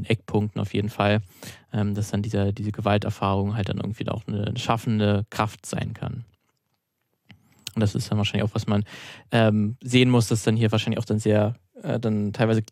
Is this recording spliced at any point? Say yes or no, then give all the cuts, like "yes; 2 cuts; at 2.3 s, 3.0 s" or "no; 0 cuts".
no; 0 cuts